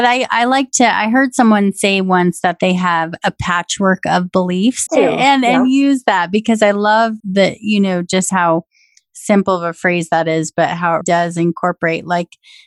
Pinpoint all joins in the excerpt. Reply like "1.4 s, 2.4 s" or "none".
4.9 s, 7.2 s, 11.0 s